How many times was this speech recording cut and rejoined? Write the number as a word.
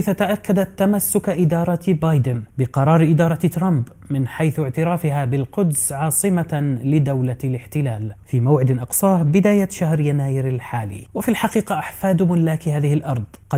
one